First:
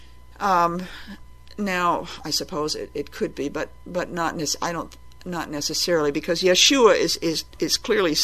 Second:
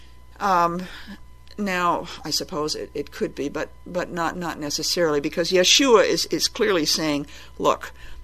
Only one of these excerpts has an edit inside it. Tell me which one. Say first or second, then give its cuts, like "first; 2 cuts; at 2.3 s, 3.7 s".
second; 2 cuts; at 4.3 s, 6.3 s